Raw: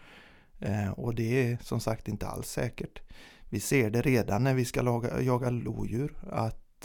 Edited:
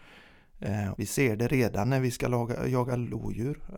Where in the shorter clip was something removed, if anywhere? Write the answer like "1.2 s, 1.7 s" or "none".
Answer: 1.0 s